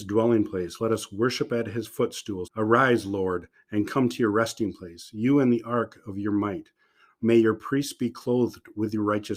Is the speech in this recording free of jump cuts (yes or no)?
no